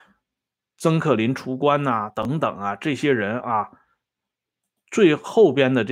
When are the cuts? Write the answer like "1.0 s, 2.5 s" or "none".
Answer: none